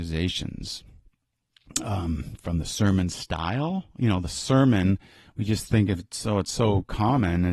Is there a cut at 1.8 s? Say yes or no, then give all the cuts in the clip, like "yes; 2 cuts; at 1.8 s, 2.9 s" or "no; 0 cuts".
no; 0 cuts